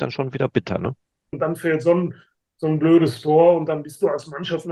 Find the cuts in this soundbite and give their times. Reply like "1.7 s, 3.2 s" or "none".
1.3 s